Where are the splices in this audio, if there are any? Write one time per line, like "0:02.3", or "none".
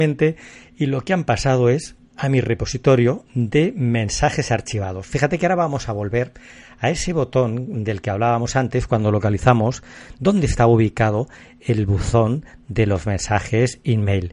0:02.1